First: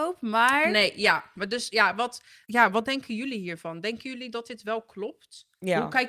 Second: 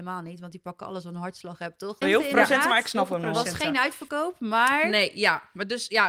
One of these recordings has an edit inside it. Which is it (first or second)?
second